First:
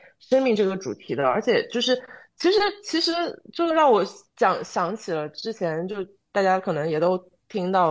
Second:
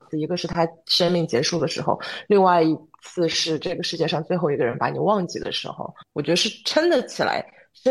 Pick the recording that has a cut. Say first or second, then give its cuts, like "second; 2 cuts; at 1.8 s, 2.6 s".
second; 1 cut; at 6.0 s